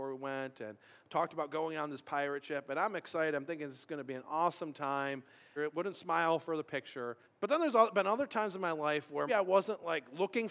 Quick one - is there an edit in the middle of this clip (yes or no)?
yes